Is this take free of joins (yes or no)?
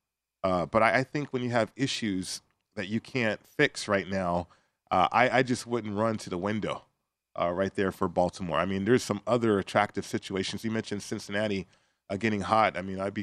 yes